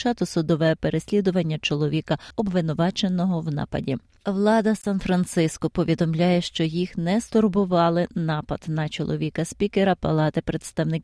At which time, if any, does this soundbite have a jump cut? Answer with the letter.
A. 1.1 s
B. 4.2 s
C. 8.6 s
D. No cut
B